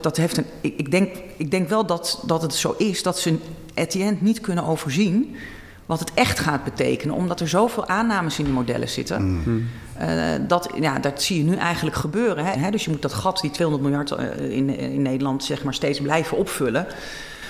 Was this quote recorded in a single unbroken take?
no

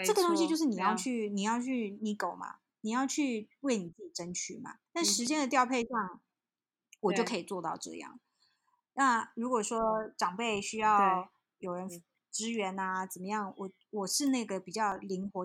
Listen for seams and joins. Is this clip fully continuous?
no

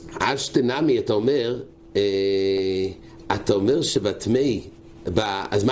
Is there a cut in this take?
no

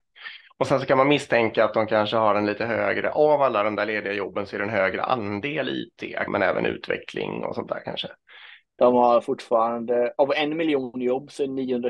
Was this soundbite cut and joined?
yes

